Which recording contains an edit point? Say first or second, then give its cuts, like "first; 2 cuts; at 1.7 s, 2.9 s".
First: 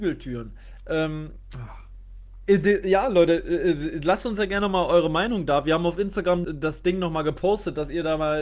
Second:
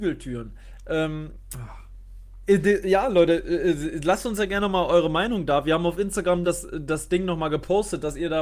first; 1 cut; at 6.4 s